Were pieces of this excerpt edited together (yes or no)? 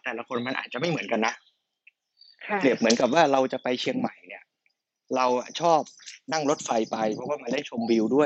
no